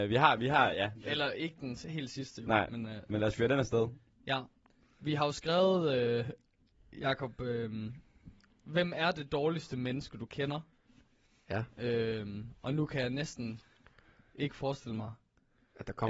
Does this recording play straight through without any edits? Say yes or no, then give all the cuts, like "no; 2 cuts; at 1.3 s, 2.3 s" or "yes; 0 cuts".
yes; 0 cuts